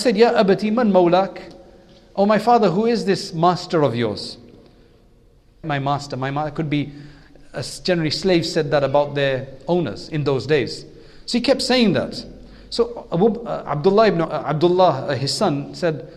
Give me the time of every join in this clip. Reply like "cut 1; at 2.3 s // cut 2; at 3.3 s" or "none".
cut 1; at 5.6 s // cut 2; at 14.2 s